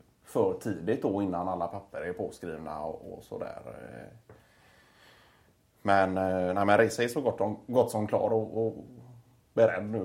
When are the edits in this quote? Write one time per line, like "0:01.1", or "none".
0:08.7